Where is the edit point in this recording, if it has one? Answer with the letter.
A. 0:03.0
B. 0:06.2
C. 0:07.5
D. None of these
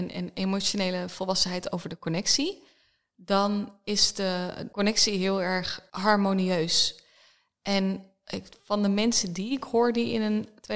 D